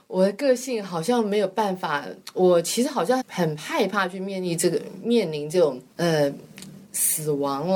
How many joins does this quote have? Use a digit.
2